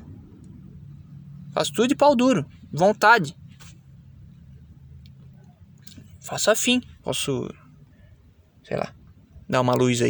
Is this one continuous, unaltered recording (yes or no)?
no